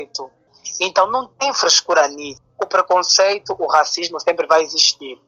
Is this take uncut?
yes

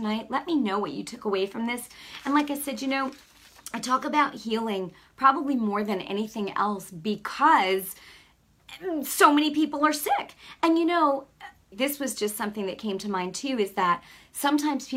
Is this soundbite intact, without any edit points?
no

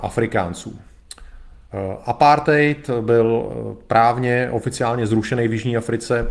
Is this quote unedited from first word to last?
yes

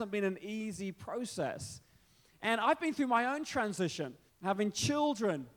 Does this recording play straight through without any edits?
no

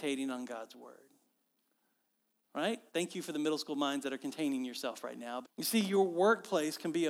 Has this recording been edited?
yes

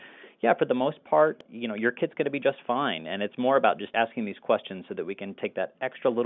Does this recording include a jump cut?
no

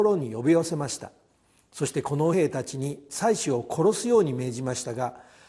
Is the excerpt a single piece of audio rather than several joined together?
no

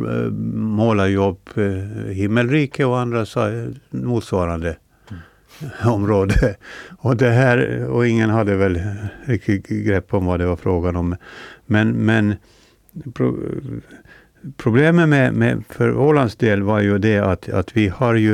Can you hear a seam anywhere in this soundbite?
no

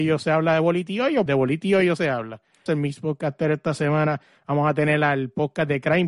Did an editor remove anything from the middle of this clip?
yes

